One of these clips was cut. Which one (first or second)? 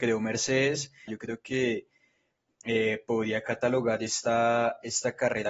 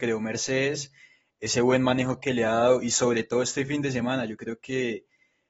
first